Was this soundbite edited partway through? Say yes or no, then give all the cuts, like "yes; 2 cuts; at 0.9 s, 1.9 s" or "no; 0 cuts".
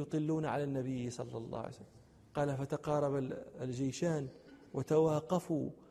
no; 0 cuts